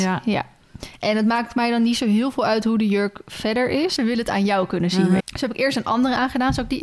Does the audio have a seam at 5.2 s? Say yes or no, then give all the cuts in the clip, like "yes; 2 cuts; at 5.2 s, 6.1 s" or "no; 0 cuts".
yes; 2 cuts; at 4.0 s, 5.2 s